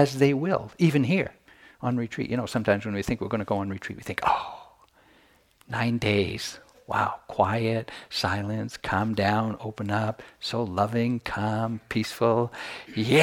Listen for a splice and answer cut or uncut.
uncut